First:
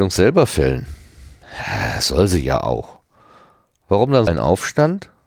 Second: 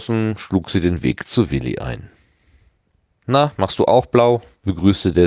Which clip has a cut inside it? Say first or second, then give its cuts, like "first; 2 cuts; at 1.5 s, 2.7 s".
first; 1 cut; at 4.3 s